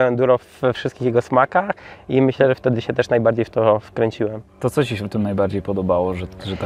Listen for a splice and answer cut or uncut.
cut